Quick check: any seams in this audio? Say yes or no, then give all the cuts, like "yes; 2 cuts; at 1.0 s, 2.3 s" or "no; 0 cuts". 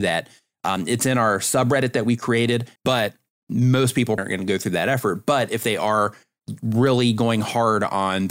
yes; 2 cuts; at 2.8 s, 4.2 s